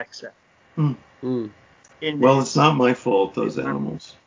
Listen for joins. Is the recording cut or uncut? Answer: uncut